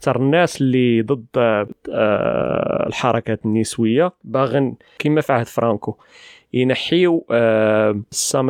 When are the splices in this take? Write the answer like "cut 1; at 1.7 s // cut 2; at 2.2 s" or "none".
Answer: none